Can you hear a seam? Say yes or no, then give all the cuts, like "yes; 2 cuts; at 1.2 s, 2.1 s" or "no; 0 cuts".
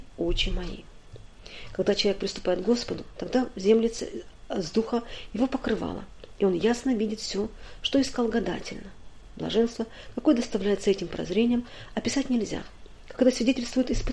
no; 0 cuts